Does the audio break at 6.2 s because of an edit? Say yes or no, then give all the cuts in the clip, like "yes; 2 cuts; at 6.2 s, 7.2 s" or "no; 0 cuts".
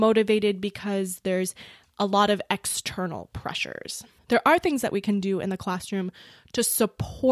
no; 1 cut; at 4.2 s